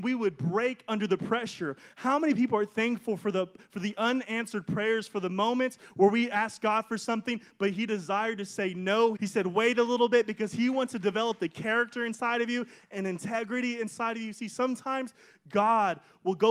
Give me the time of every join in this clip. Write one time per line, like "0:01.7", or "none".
0:09.2